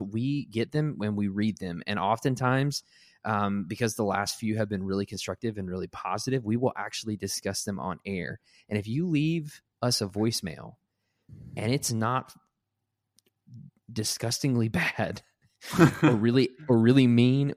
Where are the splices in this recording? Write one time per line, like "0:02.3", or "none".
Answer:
none